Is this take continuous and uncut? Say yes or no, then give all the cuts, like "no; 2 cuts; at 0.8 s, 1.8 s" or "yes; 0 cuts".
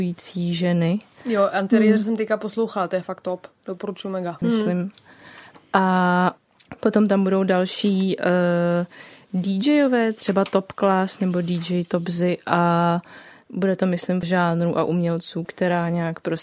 no; 3 cuts; at 4.4 s, 14.2 s, 15.4 s